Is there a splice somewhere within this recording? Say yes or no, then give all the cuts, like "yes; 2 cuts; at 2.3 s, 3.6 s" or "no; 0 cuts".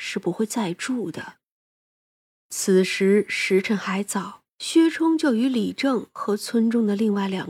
yes; 1 cut; at 4.5 s